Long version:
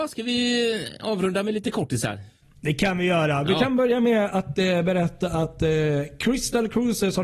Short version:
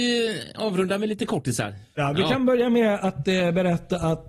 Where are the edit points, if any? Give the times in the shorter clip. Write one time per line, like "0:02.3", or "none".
0:02.0